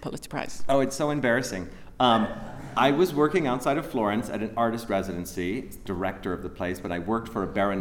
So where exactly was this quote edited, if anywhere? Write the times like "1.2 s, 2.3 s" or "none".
none